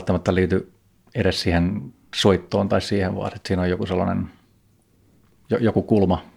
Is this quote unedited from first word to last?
yes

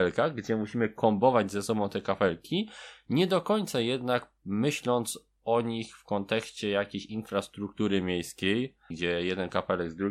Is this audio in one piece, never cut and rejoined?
no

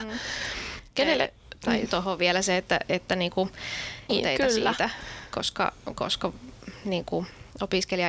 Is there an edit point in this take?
yes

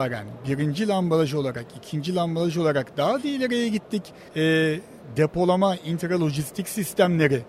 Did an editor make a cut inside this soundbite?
yes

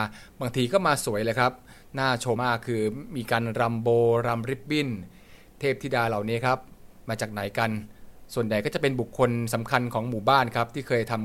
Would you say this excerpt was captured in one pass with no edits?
no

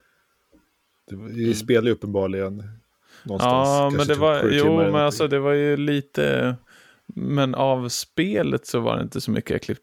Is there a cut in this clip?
no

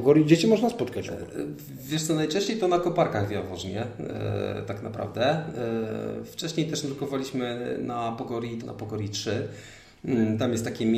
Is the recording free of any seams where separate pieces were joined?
no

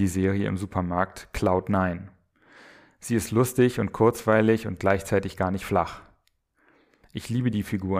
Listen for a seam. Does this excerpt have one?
no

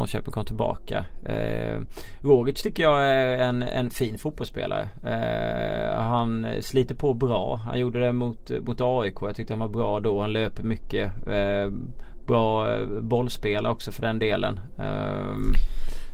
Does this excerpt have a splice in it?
no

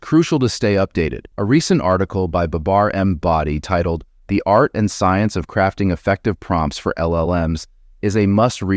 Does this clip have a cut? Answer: yes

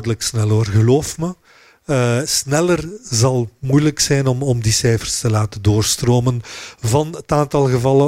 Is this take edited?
no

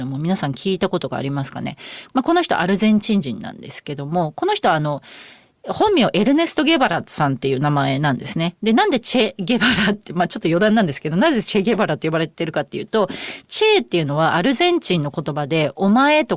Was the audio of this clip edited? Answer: yes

